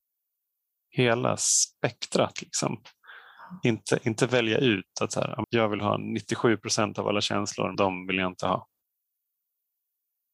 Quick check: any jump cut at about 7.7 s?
yes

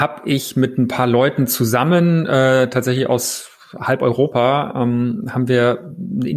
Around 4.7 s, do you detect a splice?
no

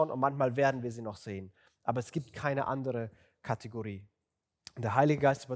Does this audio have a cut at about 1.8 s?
no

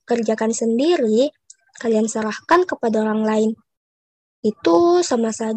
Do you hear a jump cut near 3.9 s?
no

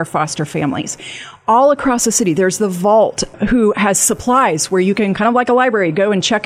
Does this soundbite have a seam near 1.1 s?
no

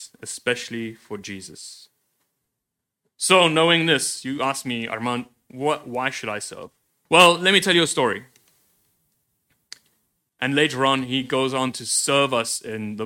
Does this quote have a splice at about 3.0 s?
no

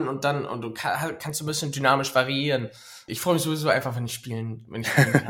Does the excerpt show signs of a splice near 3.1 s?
yes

